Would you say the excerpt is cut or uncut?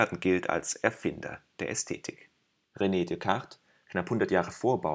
cut